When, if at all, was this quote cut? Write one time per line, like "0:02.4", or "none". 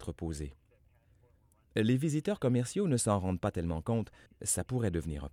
0:04.3